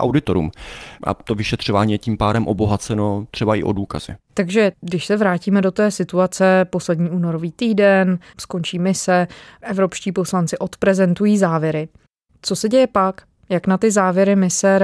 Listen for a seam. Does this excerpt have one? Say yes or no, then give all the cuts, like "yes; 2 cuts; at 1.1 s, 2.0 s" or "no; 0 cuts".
no; 0 cuts